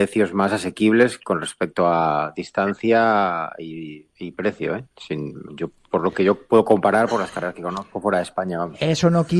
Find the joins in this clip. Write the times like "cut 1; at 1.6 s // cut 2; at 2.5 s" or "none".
cut 1; at 4.1 s // cut 2; at 5.5 s